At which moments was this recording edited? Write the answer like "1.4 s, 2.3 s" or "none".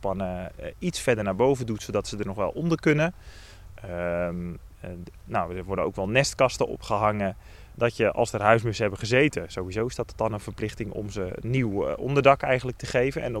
7.7 s